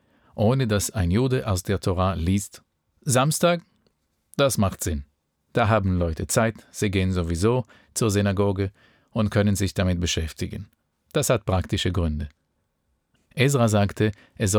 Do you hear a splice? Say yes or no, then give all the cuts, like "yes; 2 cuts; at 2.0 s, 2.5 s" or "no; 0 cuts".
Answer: yes; 2 cuts; at 10.9 s, 13.2 s